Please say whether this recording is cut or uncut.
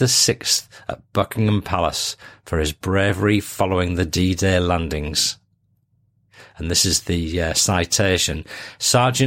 uncut